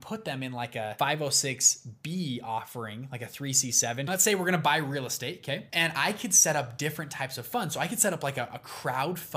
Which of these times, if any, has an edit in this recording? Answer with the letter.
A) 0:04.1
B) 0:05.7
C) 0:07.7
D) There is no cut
A